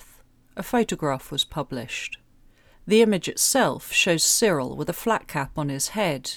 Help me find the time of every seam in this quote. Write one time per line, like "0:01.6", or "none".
0:02.7